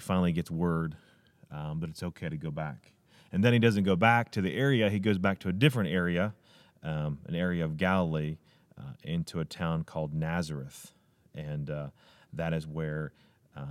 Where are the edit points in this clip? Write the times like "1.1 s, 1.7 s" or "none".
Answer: none